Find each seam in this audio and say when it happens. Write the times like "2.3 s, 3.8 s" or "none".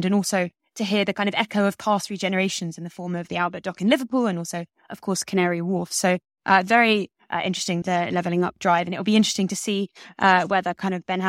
7.8 s